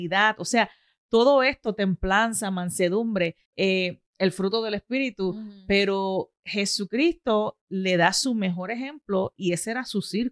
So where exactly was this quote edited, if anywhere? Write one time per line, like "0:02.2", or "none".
0:03.4